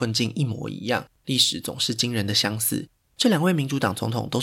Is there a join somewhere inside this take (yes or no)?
yes